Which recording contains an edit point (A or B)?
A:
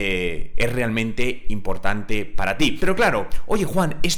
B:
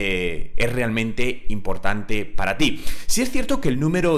A